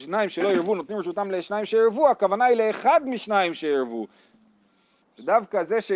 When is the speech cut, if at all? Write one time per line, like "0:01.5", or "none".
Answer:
0:05.0